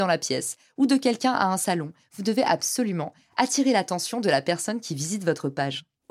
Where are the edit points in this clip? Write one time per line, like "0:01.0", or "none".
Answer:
0:02.0

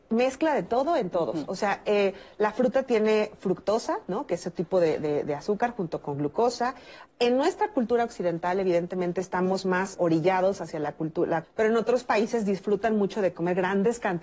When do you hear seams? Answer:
0:07.1
0:10.0
0:11.4

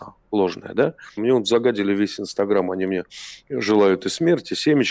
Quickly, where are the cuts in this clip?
0:01.2

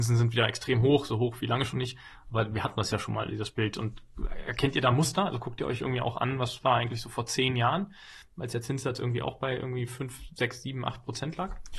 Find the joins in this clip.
none

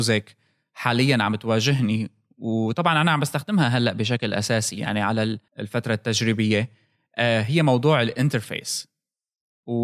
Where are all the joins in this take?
0:05.5

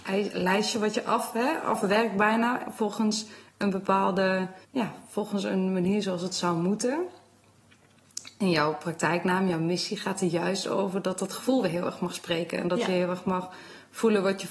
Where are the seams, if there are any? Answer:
0:04.6

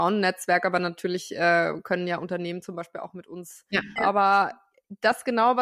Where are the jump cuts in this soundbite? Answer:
0:04.0

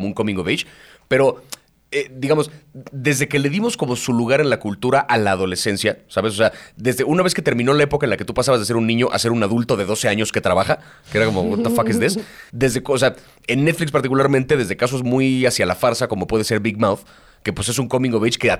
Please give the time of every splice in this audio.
0:12.5

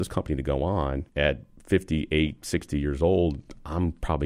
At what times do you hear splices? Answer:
0:01.1

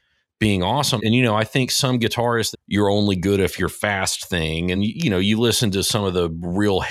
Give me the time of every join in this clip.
0:01.0
0:02.5
0:04.7

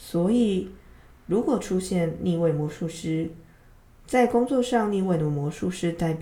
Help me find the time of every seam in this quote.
0:03.9

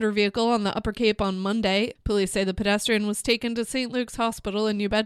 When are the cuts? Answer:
0:02.0

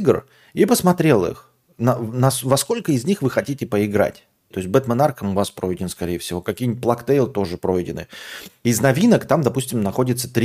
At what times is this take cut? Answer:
0:04.5

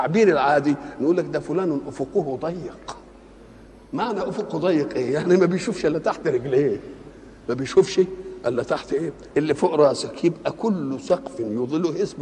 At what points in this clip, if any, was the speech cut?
0:09.3

